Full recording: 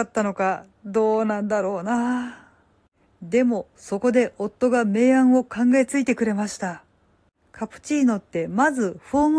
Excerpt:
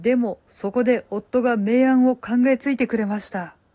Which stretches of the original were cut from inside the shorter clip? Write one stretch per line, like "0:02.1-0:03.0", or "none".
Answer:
none